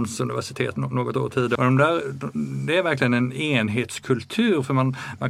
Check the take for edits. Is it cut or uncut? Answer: cut